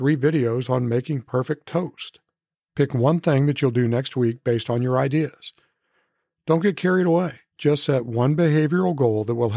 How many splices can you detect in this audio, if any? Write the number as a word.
two